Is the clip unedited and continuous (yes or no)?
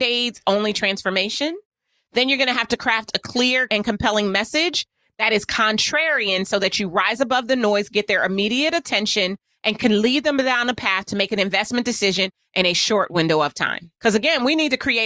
no